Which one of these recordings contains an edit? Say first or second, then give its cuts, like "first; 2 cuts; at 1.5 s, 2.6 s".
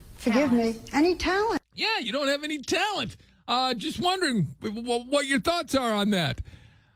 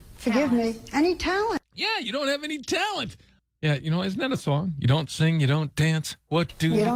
second; 1 cut; at 3.4 s